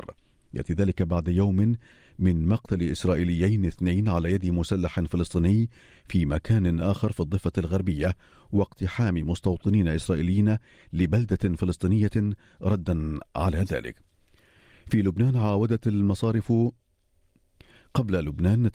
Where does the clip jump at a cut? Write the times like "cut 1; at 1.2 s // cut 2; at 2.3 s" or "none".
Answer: none

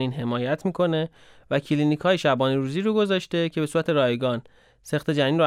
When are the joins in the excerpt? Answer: none

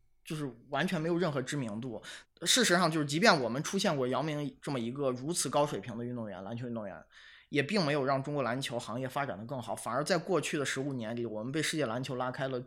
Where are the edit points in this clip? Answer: cut 1; at 2.2 s

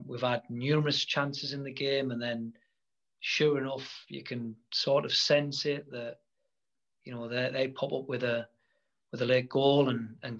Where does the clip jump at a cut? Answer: none

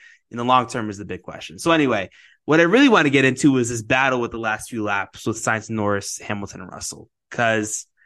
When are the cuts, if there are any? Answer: none

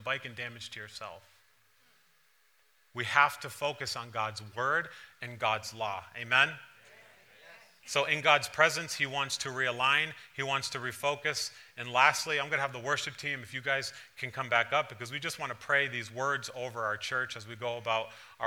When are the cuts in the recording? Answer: none

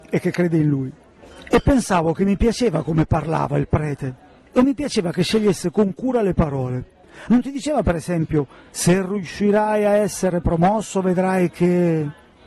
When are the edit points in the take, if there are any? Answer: cut 1; at 7.3 s

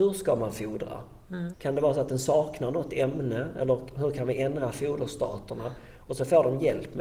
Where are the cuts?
cut 1; at 1.5 s

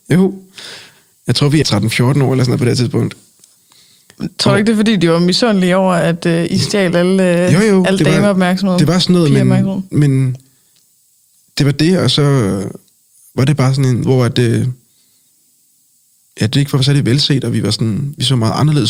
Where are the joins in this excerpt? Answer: cut 1; at 1.6 s // cut 2; at 14.0 s

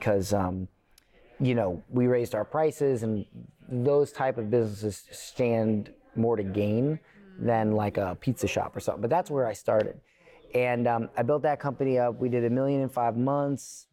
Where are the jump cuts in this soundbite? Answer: none

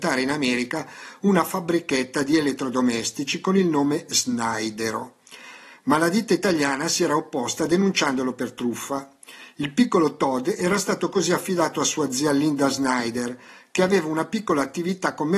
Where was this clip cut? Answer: none

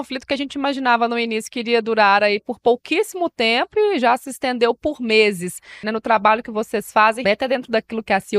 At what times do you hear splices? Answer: cut 1; at 5.8 s // cut 2; at 7.2 s

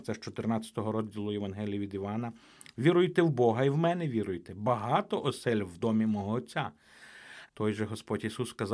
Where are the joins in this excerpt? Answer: cut 1; at 7.5 s

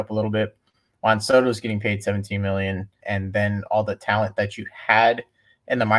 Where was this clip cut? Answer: cut 1; at 3.0 s

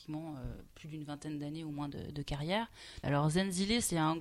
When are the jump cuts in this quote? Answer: cut 1; at 3.0 s

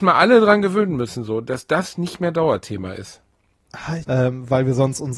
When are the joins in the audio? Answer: cut 1; at 4.0 s

